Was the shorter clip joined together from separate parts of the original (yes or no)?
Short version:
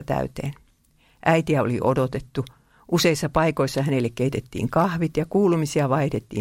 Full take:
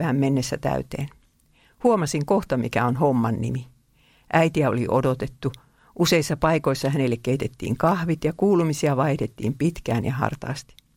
yes